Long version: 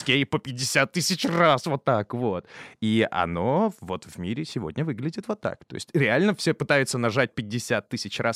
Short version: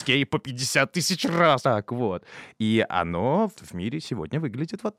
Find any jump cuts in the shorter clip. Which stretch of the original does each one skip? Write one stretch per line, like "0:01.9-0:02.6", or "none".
0:01.6-0:01.8
0:03.8-0:04.0

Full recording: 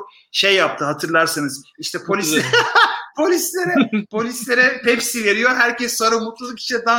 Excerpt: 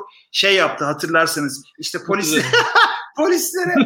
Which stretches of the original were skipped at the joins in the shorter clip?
none

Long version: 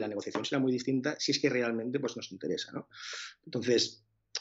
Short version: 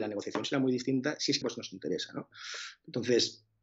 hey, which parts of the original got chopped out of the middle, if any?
0:01.4-0:02.0

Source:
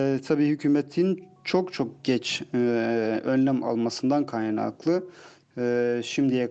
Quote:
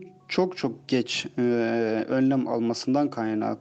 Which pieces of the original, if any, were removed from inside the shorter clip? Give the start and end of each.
none

